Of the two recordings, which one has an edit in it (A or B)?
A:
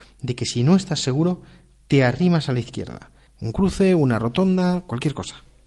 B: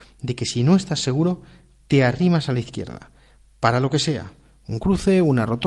A